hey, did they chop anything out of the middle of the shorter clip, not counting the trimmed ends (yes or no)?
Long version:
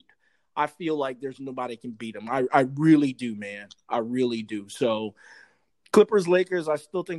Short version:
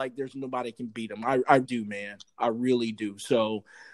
yes